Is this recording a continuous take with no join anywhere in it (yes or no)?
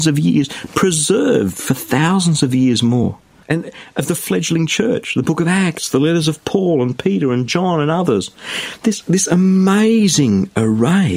no